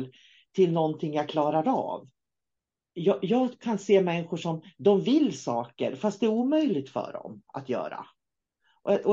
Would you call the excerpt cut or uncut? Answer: uncut